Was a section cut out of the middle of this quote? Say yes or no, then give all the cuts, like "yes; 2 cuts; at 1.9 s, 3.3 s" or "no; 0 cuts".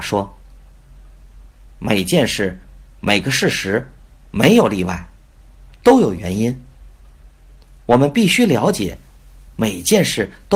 no; 0 cuts